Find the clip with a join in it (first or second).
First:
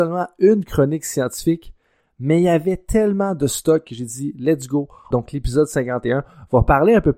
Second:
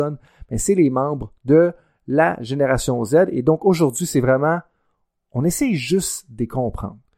first